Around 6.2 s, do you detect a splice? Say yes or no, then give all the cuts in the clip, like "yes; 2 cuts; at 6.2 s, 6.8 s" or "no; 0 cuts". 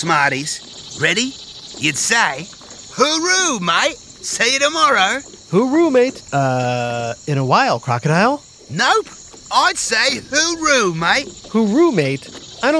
yes; 1 cut; at 6.2 s